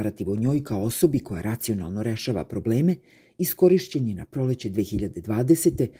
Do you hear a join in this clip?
no; 0 cuts

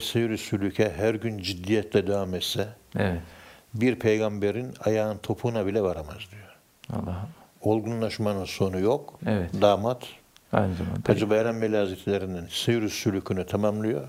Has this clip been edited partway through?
yes; 2 cuts; at 7.5 s, 9.2 s

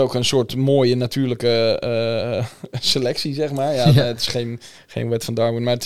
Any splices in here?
no; 0 cuts

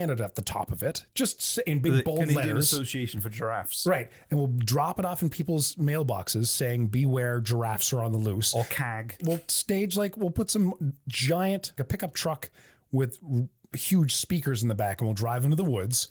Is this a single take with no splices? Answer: no; 2 cuts; at 9.2 s, 11.8 s

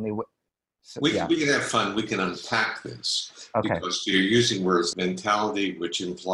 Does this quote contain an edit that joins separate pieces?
yes; 1 cut; at 4.9 s

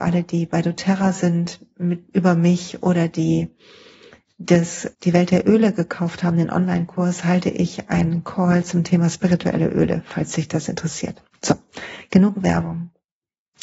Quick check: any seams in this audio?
yes; 1 cut; at 4.9 s

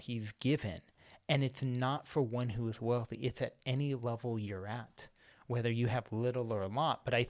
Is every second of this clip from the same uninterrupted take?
yes; 0 cuts

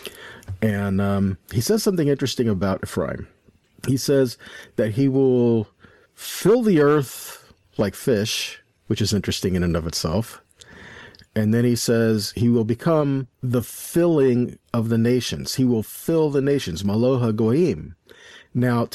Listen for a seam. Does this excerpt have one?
yes; 1 cut; at 13.3 s

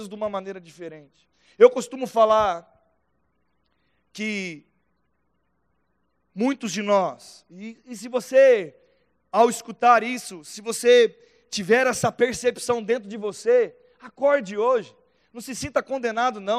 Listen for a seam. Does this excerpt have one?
no; 0 cuts

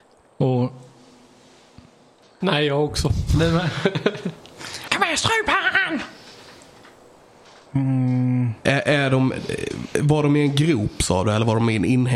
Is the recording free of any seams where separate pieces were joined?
no; 2 cuts; at 2.4 s, 4.9 s

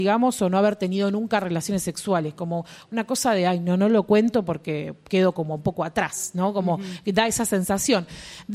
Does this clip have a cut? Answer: no; 0 cuts

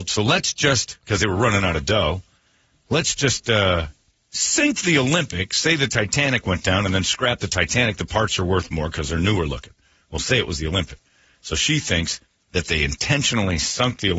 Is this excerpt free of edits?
yes; 0 cuts

